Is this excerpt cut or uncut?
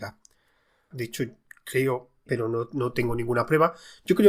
cut